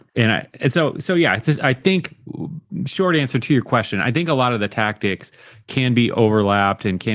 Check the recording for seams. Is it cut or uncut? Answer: uncut